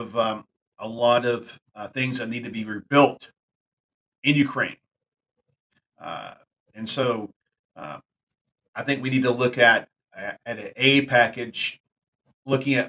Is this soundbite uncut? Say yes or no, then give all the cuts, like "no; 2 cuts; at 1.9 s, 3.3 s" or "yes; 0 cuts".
yes; 0 cuts